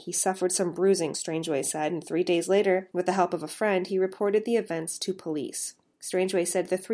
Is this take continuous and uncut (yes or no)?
yes